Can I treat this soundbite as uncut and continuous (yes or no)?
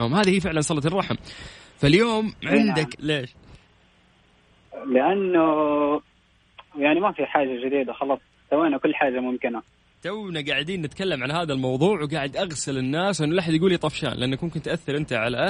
no